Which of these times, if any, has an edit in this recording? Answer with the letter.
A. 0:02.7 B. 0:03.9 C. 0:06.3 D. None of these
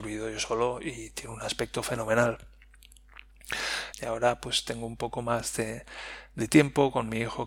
B